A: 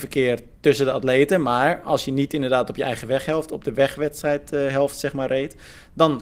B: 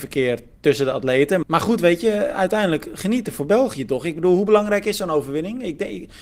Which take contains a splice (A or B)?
B